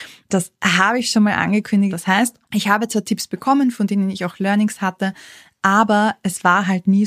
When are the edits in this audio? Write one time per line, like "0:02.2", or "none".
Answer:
0:01.9

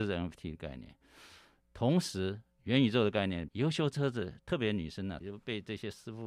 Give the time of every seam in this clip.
0:03.5
0:05.2

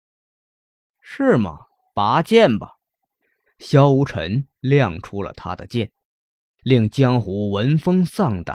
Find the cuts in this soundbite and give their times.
0:01.9

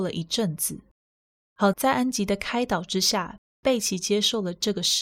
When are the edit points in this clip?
0:01.7

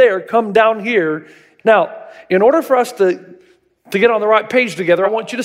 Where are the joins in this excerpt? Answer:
0:01.6

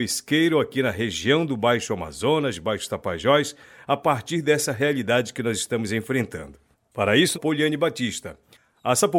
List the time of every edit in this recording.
0:07.3

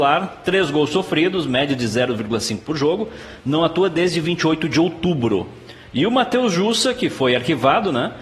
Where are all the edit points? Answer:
none

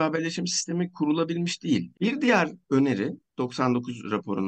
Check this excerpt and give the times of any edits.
0:01.9

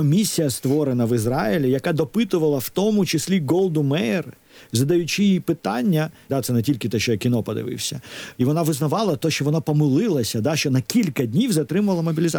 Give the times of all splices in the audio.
0:06.3
0:08.3

